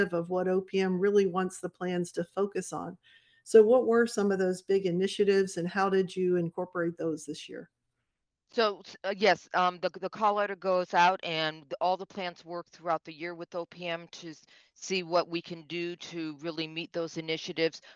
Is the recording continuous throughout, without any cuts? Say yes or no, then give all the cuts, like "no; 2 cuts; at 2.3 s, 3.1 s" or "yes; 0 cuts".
yes; 0 cuts